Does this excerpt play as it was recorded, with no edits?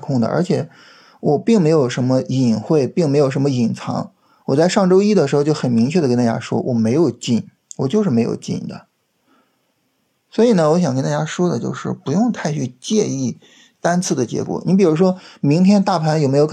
yes; 0 cuts

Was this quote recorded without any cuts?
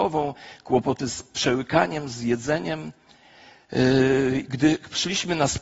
yes; 0 cuts

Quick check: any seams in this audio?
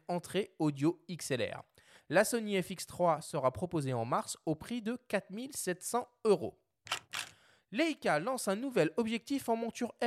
no; 0 cuts

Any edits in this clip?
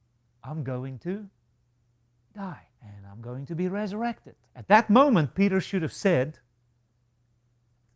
yes; 2 cuts; at 2.7 s, 4.4 s

